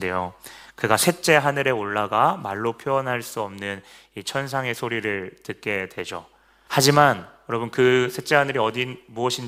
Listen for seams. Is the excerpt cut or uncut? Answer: cut